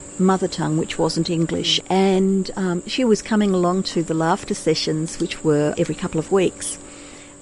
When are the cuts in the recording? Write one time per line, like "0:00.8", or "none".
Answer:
0:01.8
0:05.7